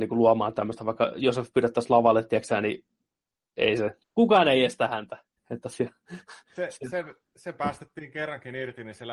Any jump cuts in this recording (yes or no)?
yes